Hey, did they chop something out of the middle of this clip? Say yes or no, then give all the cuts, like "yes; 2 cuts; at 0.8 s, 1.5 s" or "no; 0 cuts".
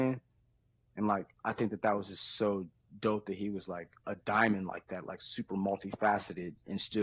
no; 0 cuts